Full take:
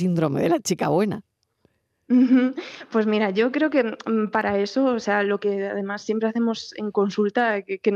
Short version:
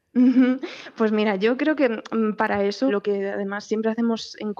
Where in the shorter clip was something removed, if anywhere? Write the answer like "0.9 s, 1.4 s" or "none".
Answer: 2.9 s